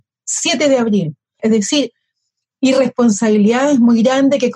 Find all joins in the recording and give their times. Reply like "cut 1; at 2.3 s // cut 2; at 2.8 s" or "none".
cut 1; at 1.4 s